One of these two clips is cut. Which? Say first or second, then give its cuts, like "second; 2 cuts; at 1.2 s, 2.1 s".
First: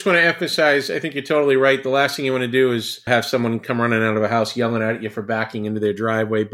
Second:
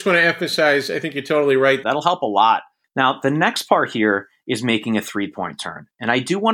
second; 1 cut; at 1.8 s